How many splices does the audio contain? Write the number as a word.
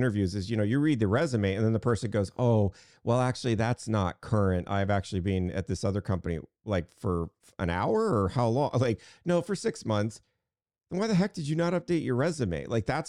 zero